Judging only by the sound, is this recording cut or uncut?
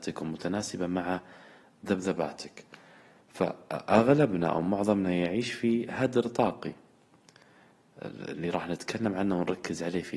uncut